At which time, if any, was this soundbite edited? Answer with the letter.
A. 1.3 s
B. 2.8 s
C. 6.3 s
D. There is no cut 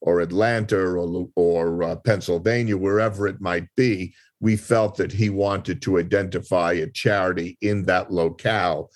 D